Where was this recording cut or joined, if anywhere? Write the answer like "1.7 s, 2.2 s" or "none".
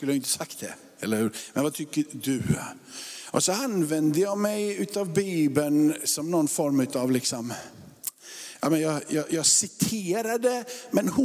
none